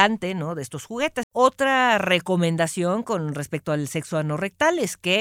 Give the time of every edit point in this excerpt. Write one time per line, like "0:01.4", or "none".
0:01.2

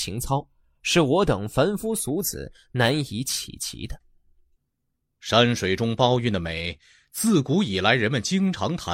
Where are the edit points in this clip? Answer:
none

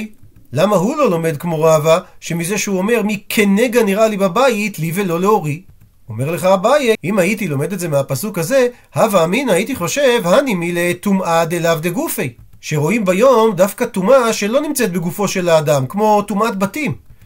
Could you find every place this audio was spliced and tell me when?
0:06.9

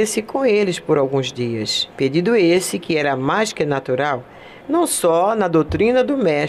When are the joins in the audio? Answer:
0:01.9
0:04.6

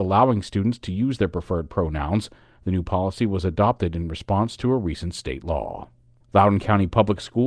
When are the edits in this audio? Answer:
0:06.2

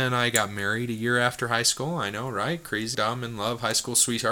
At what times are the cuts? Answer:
0:02.9

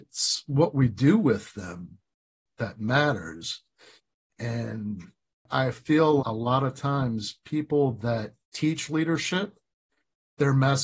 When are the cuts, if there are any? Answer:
0:06.2
0:08.4

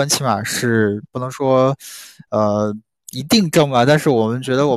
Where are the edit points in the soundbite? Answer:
none

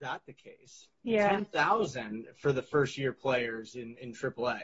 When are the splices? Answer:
0:00.9

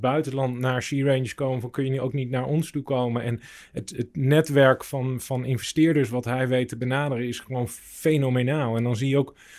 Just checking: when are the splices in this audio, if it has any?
none

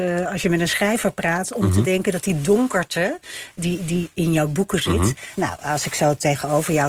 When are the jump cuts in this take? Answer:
0:05.3

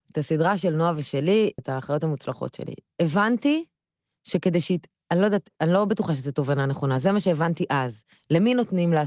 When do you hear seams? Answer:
0:01.6

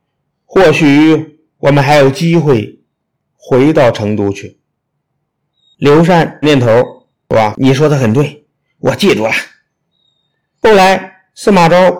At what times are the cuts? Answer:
0:06.4

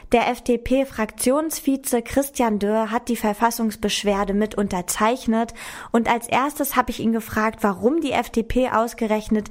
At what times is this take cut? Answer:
none

